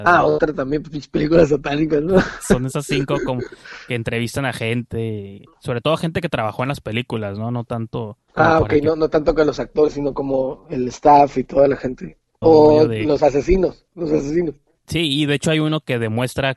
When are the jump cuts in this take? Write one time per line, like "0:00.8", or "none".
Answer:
0:08.3
0:12.4